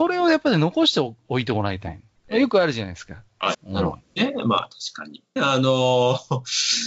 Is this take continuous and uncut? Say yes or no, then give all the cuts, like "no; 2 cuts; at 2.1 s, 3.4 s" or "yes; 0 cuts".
no; 3 cuts; at 2.2 s, 3.5 s, 5.4 s